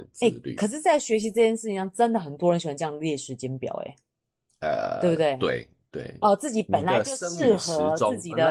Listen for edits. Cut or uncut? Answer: cut